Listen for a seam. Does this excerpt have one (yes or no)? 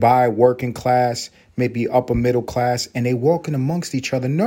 no